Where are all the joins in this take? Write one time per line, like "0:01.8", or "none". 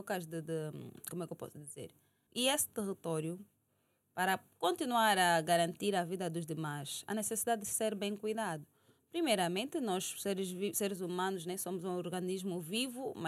0:02.3